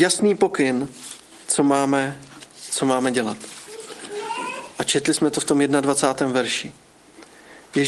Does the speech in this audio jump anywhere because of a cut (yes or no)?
no